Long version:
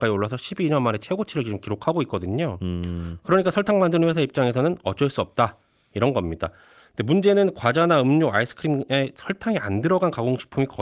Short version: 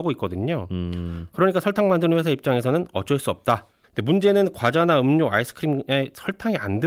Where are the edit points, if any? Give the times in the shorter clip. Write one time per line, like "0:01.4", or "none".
0:03.8